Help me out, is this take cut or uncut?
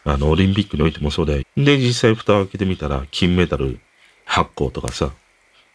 cut